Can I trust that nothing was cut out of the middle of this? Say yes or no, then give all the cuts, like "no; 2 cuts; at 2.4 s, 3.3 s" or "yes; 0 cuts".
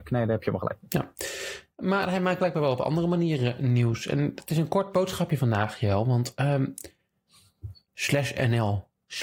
no; 1 cut; at 7.9 s